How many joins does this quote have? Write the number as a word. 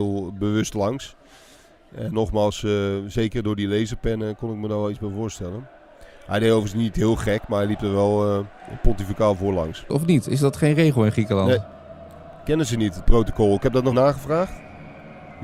two